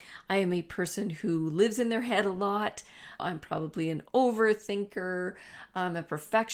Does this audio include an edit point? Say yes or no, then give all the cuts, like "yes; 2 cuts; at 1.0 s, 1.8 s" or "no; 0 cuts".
yes; 1 cut; at 3.2 s